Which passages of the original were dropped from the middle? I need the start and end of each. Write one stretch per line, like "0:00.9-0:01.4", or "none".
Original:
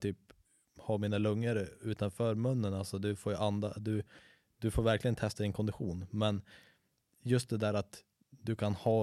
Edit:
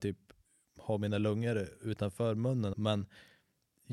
0:02.7-0:06.1